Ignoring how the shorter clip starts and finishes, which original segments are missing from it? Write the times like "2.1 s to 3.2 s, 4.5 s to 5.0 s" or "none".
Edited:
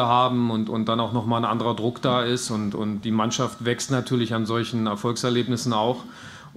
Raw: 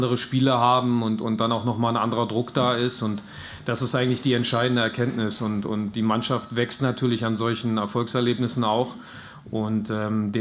3.0 s to 5.4 s